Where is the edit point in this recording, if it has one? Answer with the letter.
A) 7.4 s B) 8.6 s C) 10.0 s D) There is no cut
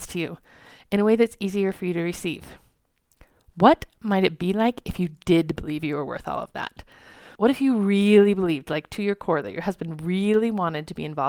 A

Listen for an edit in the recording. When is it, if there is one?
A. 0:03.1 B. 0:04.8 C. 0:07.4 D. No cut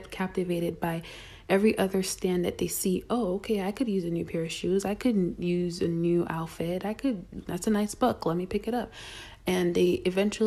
C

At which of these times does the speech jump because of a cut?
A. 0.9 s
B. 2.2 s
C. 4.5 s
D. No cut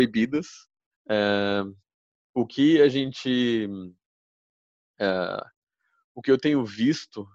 A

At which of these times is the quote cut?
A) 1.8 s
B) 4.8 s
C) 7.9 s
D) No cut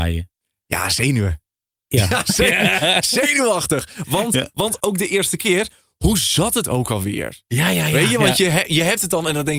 B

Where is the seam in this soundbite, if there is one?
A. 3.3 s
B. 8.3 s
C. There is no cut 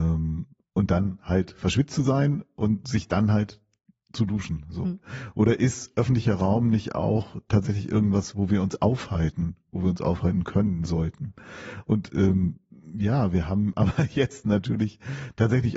C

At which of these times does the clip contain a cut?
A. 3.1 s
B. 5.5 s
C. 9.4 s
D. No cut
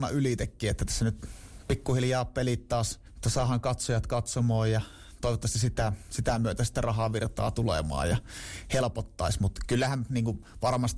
A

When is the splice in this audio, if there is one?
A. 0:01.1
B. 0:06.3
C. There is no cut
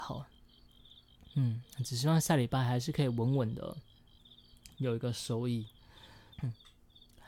B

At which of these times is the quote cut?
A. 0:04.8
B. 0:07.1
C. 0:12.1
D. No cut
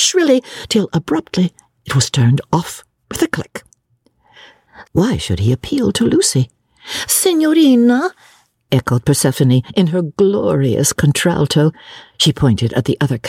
A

